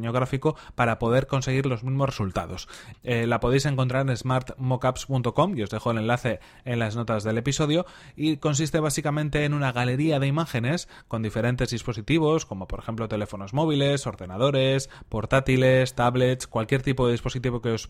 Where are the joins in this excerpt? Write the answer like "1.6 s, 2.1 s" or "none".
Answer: 2.9 s

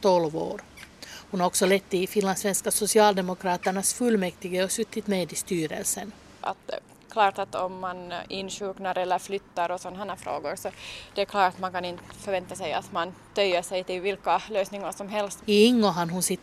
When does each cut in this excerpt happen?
6.4 s, 15.4 s

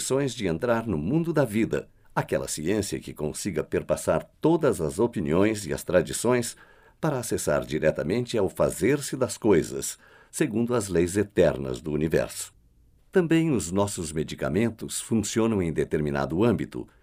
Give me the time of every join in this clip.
2.0 s, 13.0 s

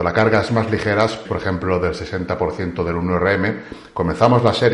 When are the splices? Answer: 1.2 s

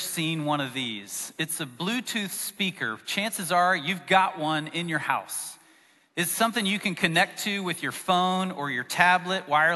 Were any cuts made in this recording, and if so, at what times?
none

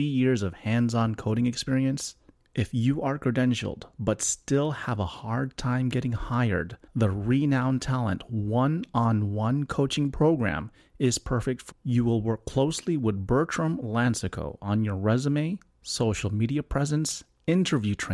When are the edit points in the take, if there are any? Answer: 6.9 s, 11.7 s

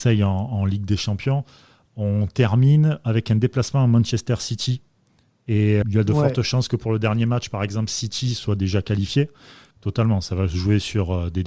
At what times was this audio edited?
5.8 s, 9.7 s

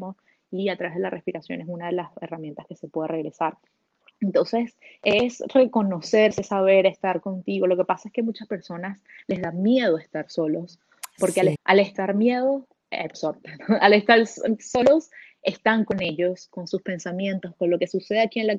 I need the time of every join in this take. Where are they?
11.5 s

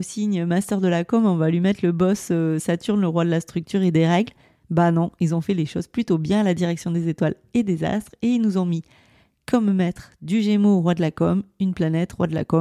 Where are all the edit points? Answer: none

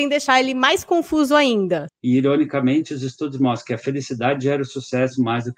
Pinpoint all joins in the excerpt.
1.9 s

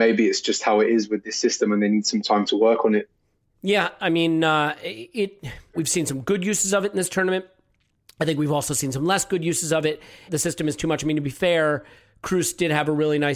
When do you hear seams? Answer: 5.7 s, 10.3 s

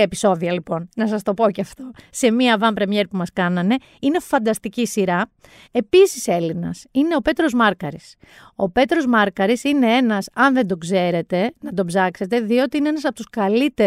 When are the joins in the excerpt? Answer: 5.6 s

